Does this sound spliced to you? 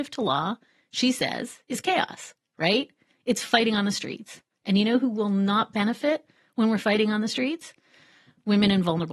no; 0 cuts

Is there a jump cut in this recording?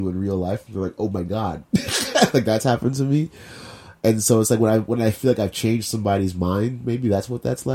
no; 0 cuts

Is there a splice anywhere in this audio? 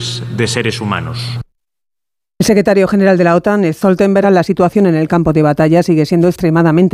yes; 1 cut; at 4.2 s

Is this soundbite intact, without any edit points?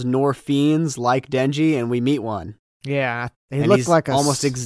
yes; 0 cuts

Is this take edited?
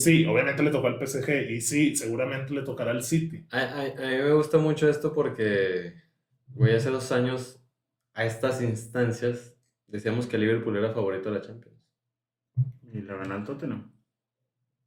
no; 0 cuts

